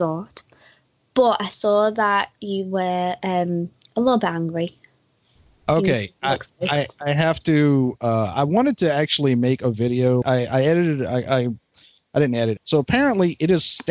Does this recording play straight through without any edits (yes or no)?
no